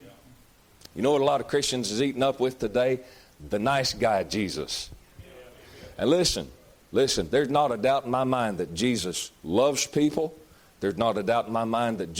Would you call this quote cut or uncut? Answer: uncut